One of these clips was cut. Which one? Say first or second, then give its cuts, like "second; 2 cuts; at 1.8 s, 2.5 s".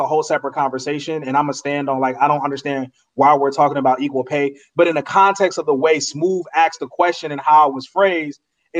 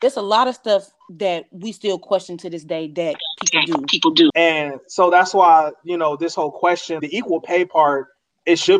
second; 2 cuts; at 4.3 s, 7.0 s